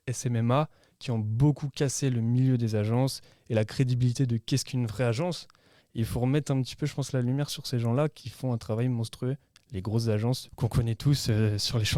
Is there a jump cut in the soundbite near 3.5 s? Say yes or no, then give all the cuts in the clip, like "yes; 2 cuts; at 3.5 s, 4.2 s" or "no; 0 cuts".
no; 2 cuts; at 5.8 s, 10.5 s